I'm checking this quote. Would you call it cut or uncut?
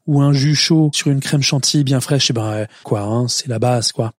cut